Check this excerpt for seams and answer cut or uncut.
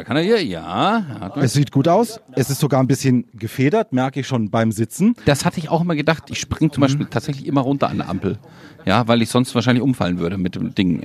uncut